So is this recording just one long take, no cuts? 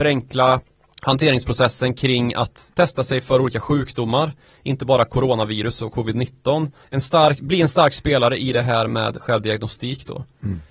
no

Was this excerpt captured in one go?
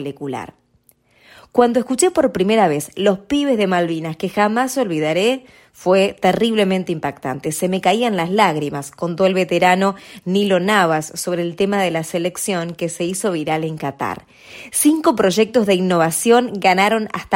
yes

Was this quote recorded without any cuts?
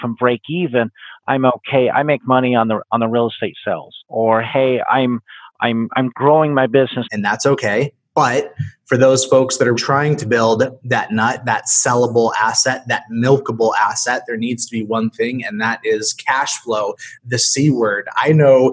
no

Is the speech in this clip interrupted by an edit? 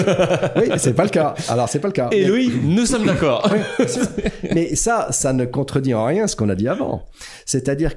no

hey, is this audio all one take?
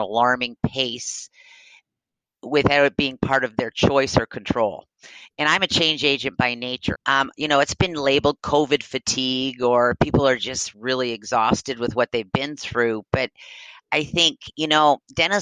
no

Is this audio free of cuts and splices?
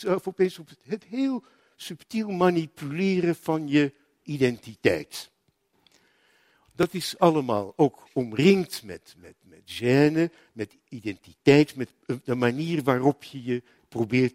yes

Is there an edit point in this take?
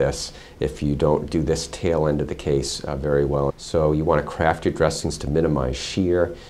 yes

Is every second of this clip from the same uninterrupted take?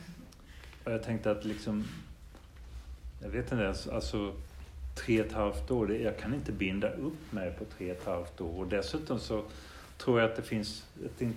yes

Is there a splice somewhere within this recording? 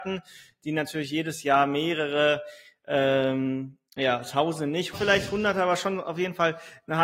yes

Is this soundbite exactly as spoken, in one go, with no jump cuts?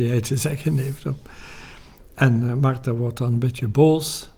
yes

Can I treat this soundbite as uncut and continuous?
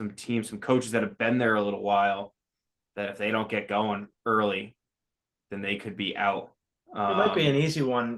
yes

